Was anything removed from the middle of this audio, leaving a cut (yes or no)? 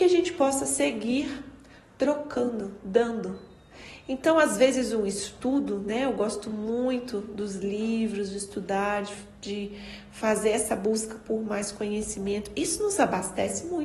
no